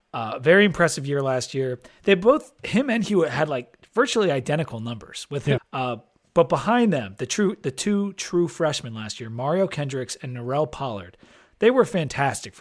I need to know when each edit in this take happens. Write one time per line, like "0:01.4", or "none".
0:05.6